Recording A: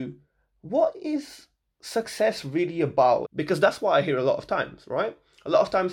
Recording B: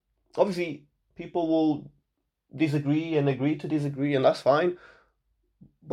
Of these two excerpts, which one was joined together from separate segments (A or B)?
A